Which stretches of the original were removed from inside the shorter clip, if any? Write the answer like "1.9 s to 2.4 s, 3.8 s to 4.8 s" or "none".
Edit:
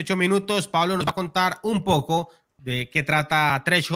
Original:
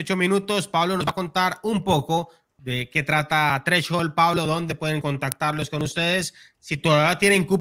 none